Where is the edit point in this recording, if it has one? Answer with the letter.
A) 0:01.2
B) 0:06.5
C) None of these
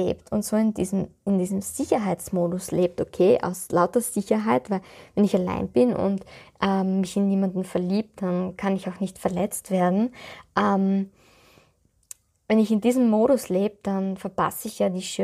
C